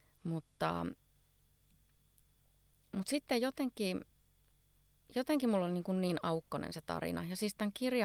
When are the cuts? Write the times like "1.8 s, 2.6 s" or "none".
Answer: none